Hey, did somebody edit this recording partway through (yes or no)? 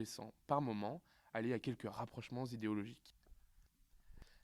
no